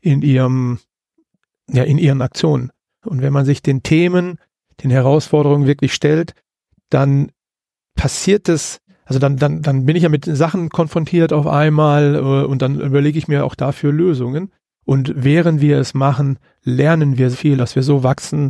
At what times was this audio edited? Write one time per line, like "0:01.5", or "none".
0:03.0
0:14.8
0:17.3